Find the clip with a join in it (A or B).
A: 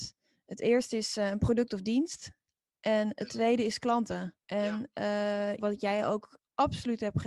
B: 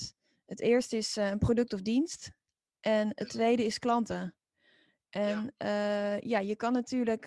A